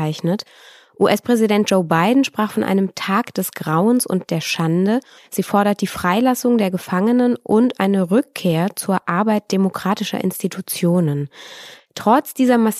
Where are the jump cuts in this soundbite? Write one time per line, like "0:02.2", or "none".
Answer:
0:05.2
0:11.8